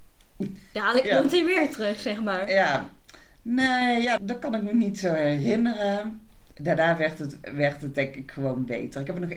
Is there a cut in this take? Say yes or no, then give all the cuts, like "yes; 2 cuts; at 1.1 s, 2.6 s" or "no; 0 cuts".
yes; 1 cut; at 4.2 s